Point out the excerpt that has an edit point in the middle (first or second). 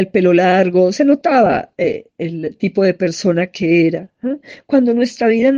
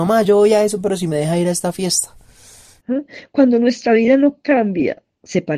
second